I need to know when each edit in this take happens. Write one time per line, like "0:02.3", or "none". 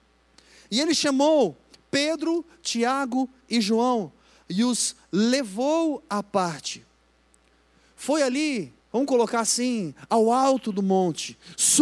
0:08.8